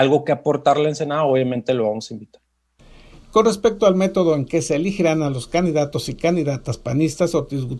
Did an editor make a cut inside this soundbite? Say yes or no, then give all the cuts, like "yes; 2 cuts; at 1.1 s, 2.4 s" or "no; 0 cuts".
no; 0 cuts